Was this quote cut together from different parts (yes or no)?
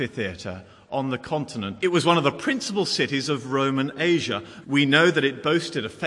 yes